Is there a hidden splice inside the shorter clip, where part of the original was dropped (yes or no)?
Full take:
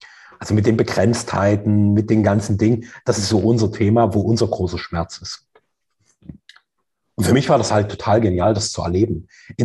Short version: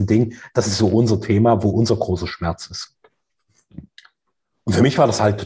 no